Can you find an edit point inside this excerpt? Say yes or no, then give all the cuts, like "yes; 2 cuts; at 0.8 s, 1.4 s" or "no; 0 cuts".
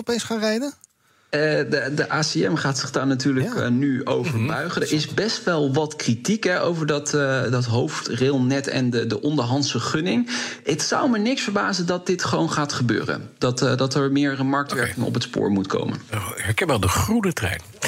no; 0 cuts